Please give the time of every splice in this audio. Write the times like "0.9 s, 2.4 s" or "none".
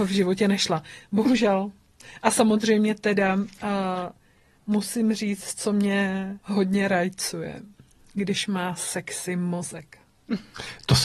6.4 s